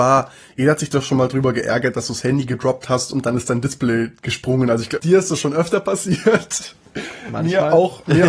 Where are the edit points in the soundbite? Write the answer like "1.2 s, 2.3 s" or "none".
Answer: 5.0 s